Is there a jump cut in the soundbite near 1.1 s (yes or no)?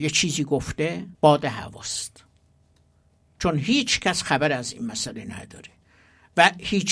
yes